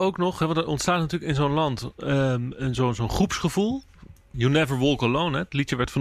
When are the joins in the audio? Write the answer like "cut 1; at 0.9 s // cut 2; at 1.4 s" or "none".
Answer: cut 1; at 4.3 s